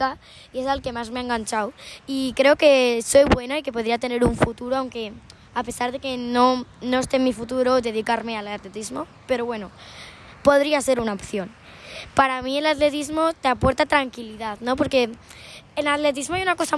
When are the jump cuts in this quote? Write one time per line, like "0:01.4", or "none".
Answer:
none